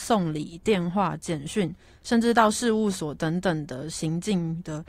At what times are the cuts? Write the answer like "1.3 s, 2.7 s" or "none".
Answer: none